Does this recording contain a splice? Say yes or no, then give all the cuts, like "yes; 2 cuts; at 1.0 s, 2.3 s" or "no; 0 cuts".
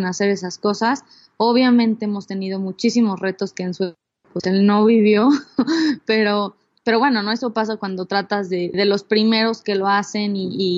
yes; 1 cut; at 8.7 s